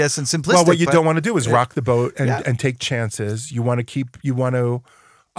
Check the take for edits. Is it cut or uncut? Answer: uncut